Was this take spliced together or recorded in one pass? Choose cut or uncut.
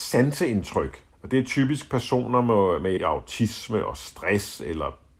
cut